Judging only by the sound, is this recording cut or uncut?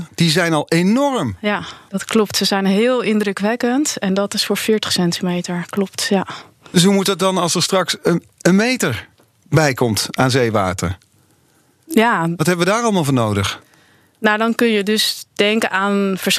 cut